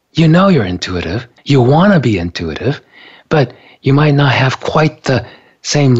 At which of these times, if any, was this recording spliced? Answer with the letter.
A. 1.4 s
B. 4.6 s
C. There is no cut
A